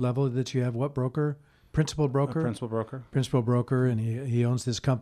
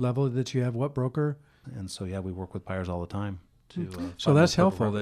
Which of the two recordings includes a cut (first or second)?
second